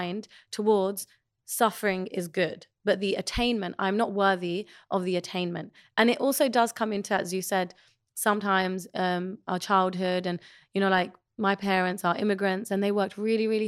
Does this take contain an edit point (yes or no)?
no